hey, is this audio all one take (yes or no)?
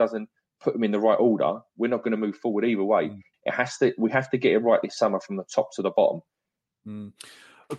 no